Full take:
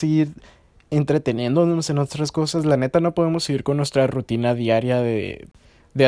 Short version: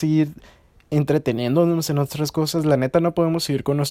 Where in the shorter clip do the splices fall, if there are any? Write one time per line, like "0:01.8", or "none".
none